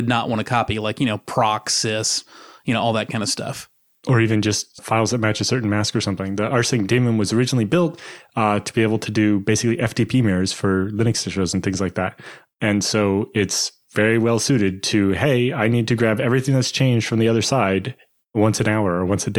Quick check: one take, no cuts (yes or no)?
no